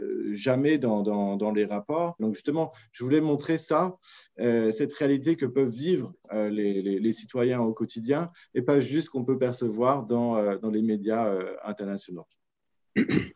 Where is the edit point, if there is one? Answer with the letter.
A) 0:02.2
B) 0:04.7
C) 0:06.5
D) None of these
A